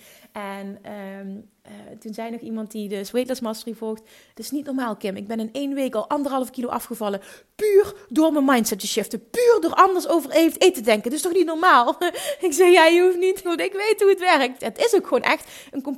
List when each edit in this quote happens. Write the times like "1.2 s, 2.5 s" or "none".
13.4 s, 14.6 s